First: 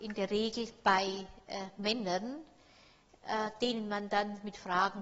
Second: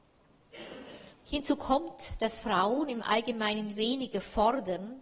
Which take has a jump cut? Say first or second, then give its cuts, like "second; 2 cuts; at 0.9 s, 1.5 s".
second; 1 cut; at 1.1 s